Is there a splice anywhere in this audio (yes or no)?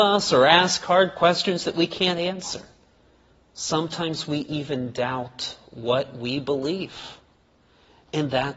no